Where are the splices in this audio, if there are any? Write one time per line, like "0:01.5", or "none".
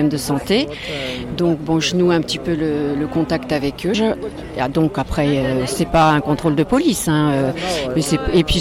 0:03.9